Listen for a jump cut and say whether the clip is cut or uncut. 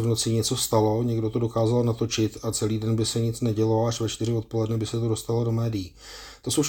uncut